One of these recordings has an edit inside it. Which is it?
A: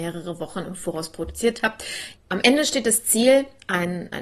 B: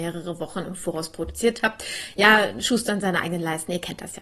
A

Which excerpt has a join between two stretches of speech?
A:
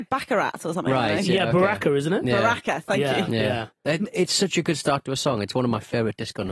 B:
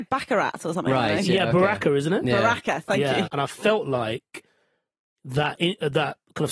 B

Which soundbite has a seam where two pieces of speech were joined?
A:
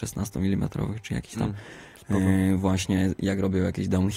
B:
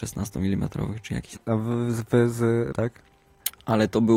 B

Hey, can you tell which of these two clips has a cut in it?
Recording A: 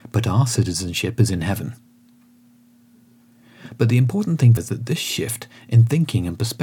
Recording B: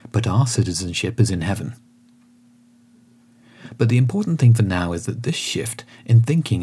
A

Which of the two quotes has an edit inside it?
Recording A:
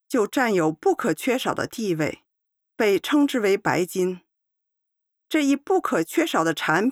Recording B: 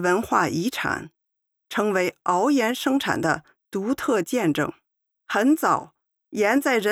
B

